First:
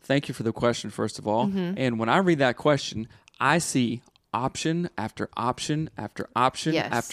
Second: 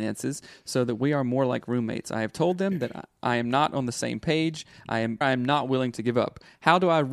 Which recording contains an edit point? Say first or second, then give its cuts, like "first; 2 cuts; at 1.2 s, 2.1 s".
second; 1 cut; at 5.2 s